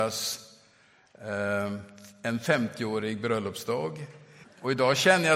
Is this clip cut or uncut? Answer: cut